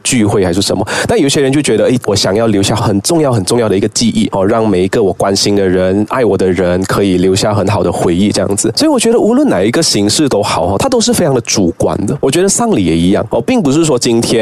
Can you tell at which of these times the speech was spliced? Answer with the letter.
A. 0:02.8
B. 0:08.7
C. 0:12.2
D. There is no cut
A